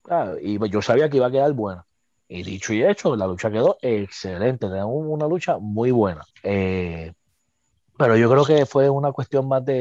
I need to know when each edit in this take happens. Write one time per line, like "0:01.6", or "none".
0:06.3

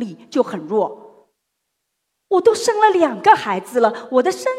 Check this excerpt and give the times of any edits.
0:02.1

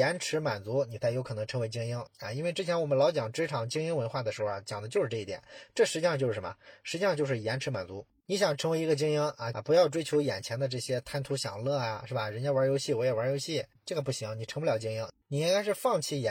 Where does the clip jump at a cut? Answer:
0:02.1
0:09.5

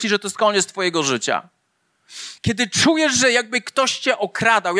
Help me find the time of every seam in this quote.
0:02.4

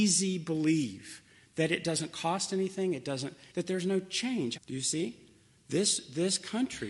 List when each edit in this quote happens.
0:03.5
0:04.6

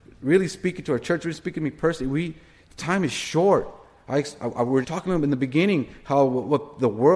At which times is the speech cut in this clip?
0:04.8

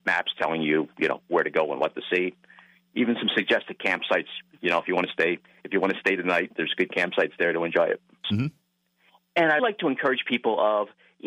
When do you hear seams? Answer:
0:08.2
0:09.6

